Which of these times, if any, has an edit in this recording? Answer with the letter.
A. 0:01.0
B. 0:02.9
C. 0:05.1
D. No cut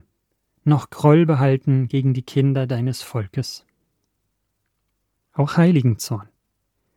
C